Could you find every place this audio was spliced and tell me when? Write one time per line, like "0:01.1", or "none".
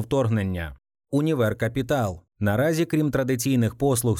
0:02.3